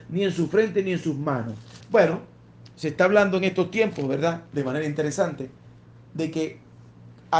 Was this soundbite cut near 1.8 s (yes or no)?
yes